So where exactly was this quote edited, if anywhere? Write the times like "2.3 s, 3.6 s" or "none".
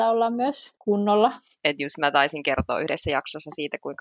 1.6 s